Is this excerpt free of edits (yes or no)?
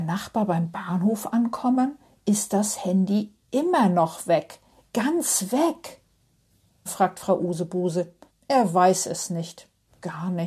no